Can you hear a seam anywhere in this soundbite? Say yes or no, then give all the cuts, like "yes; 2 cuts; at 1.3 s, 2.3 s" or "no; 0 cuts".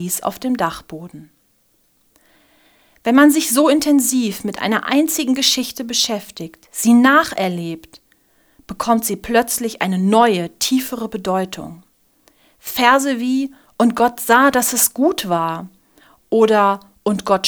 no; 0 cuts